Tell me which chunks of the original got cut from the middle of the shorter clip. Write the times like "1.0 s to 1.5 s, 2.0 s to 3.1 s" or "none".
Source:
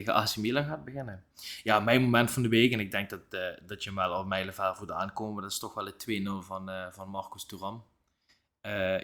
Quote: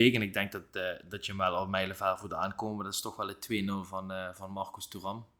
none